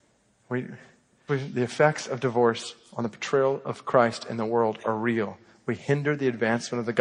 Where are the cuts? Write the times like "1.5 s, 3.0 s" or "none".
1.3 s